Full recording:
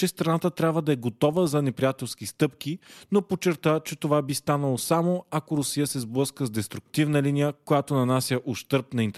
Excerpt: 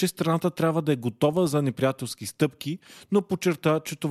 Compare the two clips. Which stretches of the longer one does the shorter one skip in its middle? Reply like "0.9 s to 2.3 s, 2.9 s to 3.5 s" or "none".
none